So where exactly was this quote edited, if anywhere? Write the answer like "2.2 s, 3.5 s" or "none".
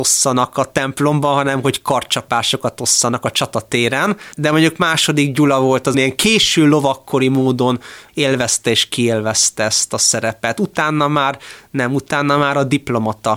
4.3 s, 5.9 s